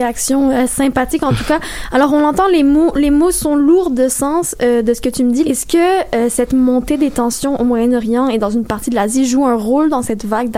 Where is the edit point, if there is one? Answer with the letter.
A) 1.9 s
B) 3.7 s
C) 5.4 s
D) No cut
C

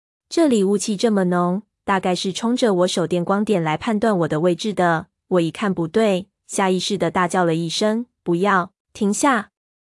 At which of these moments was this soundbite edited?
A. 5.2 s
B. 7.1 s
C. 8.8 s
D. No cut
C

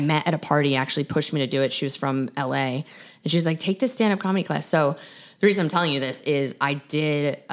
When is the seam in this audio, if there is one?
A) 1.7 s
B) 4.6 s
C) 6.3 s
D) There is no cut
D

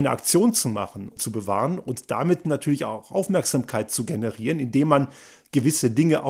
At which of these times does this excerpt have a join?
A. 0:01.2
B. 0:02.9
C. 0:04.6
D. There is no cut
A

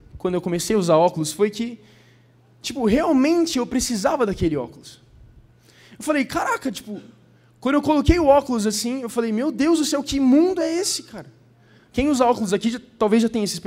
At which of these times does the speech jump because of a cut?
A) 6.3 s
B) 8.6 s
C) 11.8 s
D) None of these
C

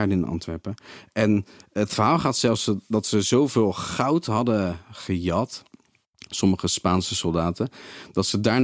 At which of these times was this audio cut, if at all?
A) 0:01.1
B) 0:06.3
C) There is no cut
C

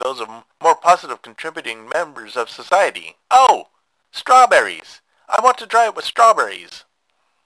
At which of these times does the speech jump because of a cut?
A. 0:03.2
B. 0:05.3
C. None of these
A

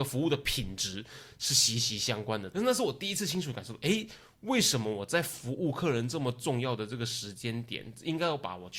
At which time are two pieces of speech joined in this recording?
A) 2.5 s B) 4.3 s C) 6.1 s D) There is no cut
A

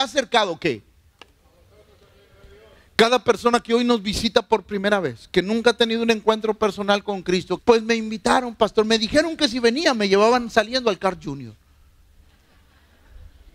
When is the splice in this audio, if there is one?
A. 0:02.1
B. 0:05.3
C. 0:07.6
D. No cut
C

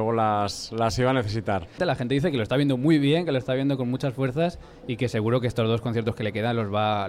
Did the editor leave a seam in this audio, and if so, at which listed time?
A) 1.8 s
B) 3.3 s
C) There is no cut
A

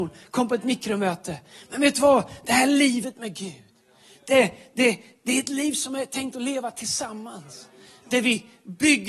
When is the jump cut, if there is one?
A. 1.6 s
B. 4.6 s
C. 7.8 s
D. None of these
D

